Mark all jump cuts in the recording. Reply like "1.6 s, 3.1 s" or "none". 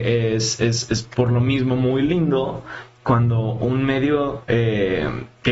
none